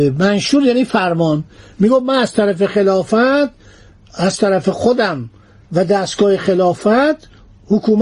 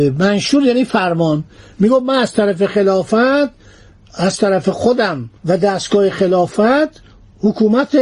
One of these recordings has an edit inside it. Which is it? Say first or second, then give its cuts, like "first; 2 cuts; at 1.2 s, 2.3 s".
second; 1 cut; at 5.4 s